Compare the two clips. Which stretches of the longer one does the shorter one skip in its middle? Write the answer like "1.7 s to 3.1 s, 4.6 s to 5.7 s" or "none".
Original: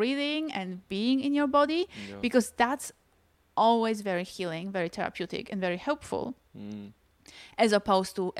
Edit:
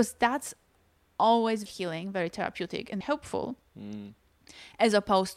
4.0 s to 4.3 s, 5.6 s to 5.8 s